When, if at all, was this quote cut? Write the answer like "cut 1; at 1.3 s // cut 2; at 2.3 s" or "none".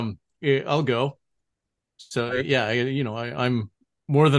none